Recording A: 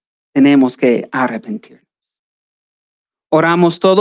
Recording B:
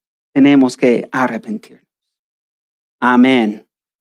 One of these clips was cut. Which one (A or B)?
B